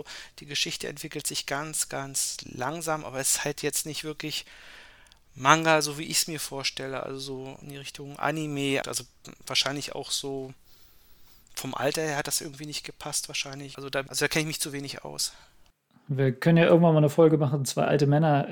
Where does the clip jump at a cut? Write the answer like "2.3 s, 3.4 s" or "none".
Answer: 7.6 s, 8.8 s, 13.7 s